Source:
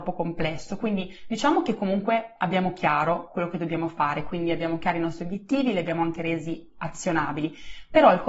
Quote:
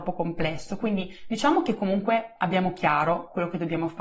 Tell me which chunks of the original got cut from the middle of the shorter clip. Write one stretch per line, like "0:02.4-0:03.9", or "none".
none